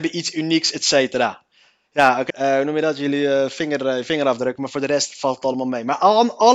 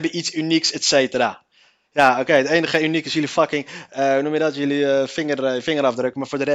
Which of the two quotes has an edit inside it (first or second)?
first